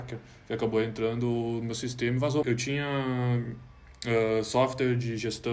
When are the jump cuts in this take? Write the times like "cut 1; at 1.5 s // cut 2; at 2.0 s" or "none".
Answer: cut 1; at 2.4 s